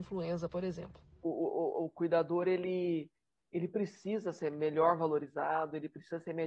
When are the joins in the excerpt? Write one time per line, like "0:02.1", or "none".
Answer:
none